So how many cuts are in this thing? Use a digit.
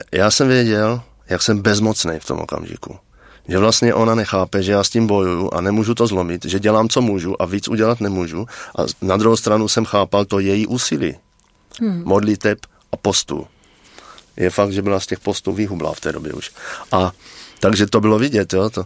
1